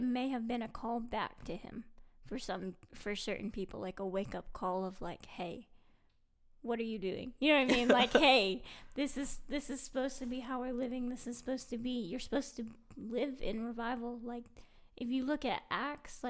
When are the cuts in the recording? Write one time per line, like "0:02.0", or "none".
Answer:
none